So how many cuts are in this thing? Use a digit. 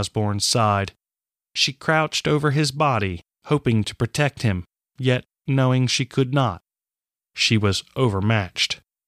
0